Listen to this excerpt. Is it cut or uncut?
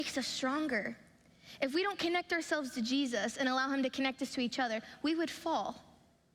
uncut